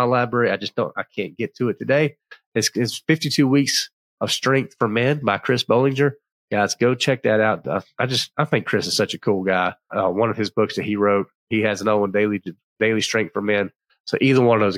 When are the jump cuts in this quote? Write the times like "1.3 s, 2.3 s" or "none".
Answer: 9.9 s, 11.4 s